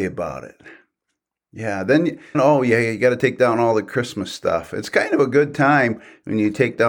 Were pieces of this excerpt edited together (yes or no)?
yes